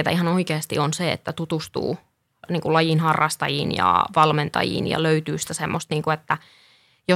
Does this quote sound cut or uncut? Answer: uncut